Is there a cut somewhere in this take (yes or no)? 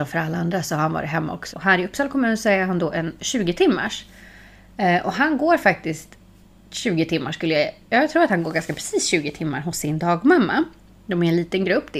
yes